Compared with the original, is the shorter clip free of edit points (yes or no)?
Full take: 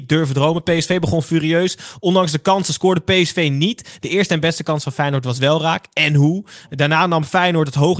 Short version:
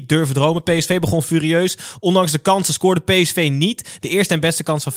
yes